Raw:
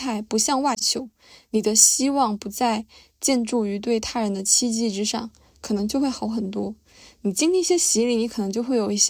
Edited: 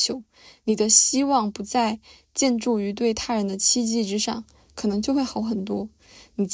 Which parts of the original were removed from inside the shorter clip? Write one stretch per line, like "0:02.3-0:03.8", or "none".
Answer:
none